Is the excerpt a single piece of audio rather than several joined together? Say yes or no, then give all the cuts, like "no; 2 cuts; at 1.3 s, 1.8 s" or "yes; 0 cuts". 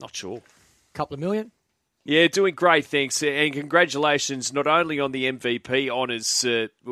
no; 1 cut; at 2.1 s